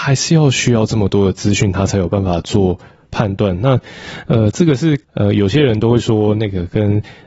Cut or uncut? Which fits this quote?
cut